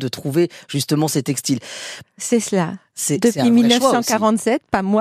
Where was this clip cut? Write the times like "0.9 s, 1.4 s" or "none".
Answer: 2.0 s